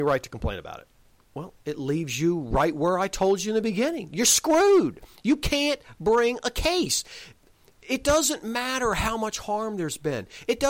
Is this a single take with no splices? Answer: no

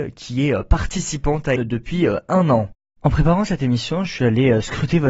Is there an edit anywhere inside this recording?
yes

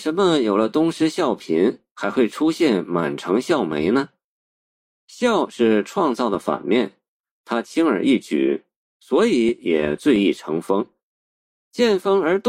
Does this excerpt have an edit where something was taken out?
no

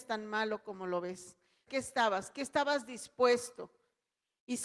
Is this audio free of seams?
no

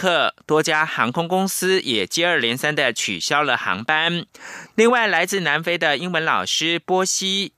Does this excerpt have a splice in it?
yes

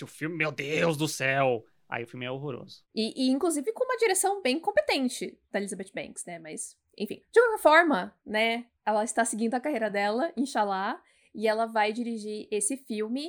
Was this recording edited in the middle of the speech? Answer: yes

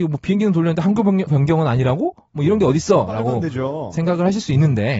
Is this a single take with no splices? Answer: no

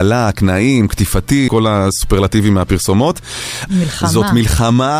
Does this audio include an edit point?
yes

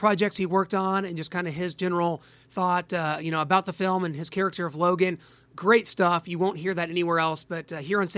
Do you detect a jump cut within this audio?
no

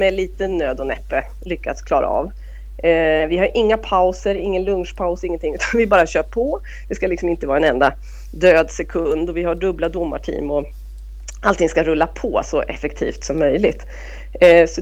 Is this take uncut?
yes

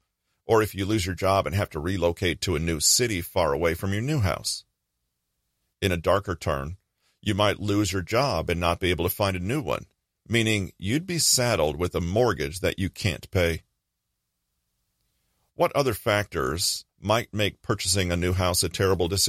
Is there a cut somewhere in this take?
yes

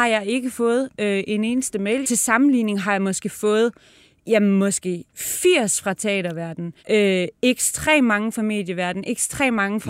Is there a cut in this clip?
yes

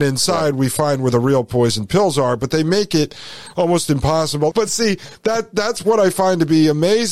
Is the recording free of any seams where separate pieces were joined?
no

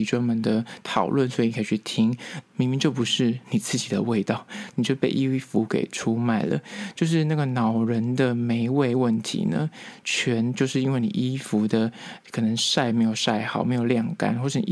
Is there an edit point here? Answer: yes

